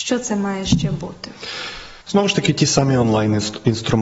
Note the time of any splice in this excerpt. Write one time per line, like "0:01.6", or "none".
0:02.0